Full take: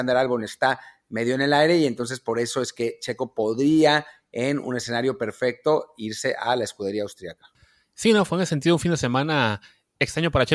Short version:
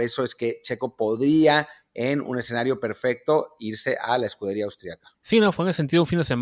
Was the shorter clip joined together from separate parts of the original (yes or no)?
yes